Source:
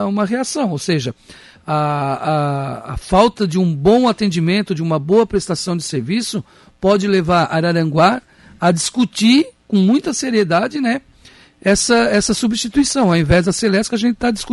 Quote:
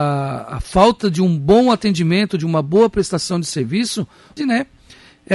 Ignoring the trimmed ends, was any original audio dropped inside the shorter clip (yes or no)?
yes